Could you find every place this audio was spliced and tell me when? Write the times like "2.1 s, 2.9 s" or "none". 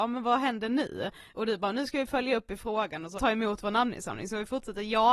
3.2 s